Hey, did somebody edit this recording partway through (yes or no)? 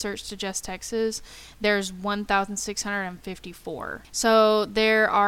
yes